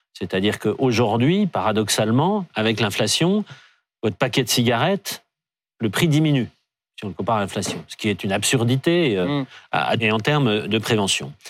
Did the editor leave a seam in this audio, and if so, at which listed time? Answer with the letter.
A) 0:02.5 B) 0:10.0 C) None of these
B